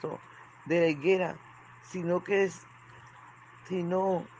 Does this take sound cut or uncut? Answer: uncut